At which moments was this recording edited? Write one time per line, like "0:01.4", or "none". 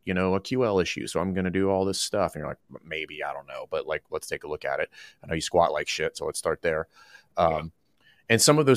none